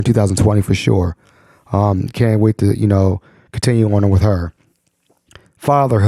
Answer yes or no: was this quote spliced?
no